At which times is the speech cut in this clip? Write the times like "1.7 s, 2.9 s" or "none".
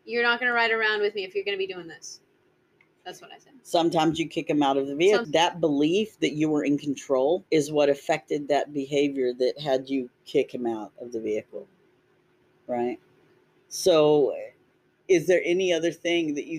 5.2 s, 7.5 s